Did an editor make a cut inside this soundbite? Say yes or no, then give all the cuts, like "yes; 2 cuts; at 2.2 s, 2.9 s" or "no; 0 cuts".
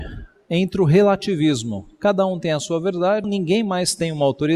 yes; 1 cut; at 3.2 s